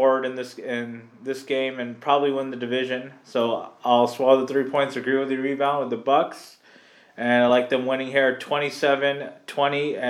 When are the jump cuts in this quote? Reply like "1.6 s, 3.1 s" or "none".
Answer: none